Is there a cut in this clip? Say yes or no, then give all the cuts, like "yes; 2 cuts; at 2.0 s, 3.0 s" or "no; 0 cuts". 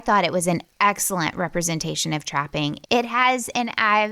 yes; 1 cut; at 2.8 s